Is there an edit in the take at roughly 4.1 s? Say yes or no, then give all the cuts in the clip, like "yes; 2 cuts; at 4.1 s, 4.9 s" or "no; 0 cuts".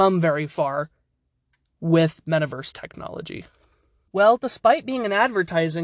yes; 1 cut; at 4.1 s